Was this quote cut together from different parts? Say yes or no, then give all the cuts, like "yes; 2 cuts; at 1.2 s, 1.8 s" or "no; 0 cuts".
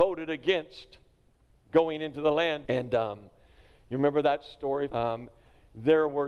yes; 2 cuts; at 2.6 s, 4.9 s